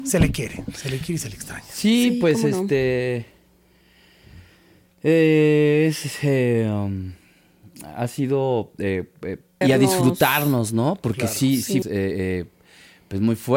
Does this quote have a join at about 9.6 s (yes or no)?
yes